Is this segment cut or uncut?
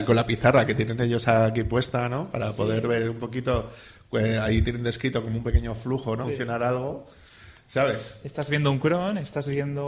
cut